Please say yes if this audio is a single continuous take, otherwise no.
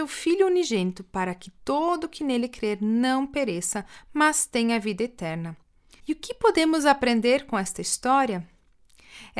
no